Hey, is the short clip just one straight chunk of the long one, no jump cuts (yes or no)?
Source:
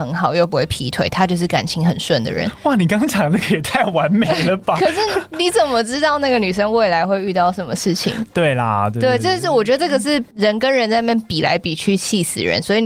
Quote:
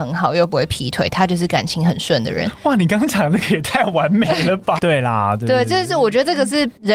no